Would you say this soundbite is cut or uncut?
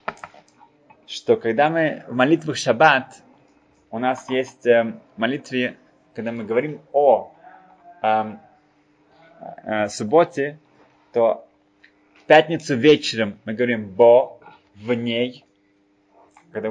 uncut